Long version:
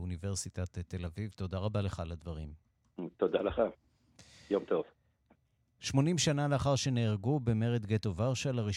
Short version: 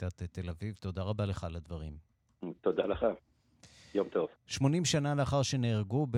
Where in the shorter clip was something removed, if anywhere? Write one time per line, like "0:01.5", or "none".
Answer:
0:04.4